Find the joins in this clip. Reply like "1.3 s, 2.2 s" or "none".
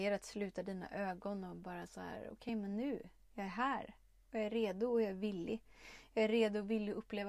none

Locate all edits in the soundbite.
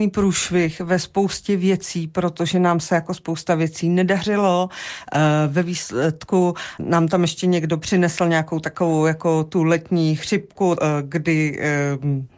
6.8 s, 10.8 s

